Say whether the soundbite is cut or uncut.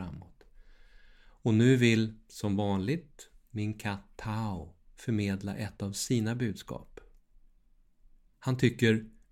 uncut